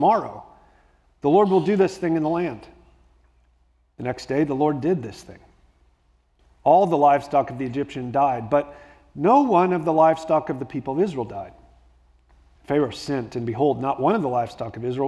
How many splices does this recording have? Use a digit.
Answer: 0